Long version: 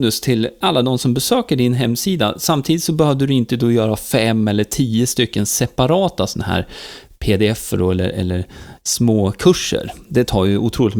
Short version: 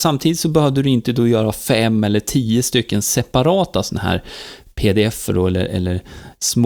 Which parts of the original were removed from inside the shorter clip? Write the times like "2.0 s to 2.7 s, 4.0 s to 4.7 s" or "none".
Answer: none